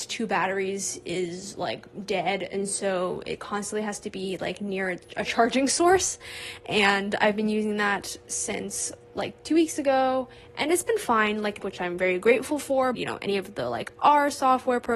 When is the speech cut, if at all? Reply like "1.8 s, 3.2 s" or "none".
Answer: 11.6 s, 12.9 s